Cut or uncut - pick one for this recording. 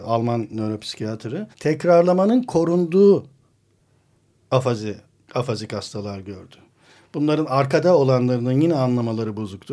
cut